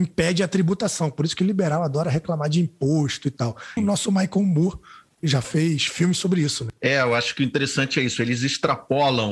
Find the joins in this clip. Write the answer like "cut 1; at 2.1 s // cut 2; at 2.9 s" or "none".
cut 1; at 3.8 s